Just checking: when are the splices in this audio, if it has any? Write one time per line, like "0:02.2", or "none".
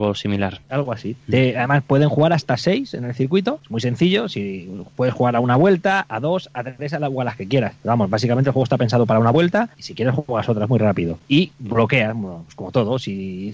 none